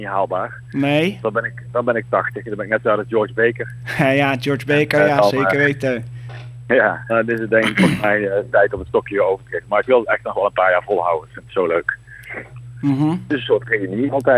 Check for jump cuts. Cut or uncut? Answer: cut